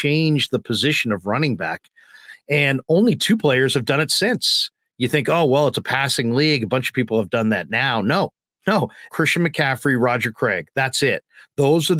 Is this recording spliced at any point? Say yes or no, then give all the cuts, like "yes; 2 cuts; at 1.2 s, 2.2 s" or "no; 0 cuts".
yes; 1 cut; at 9.1 s